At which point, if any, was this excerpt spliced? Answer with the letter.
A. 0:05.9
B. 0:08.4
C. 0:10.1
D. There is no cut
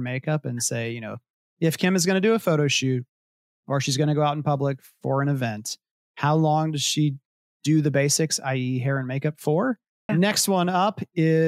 C